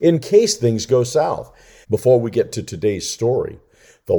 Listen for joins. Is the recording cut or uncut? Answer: cut